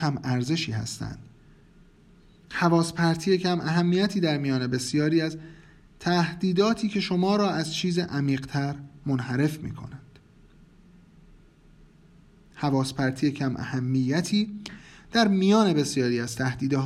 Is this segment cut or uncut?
uncut